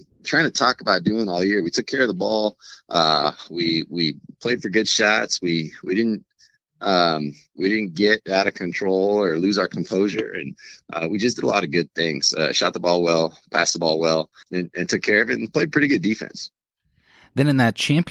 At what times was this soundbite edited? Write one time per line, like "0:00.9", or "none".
0:14.4